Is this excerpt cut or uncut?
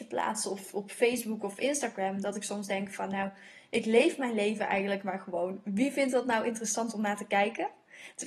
uncut